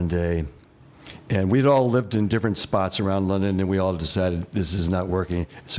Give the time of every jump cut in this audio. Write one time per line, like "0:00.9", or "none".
none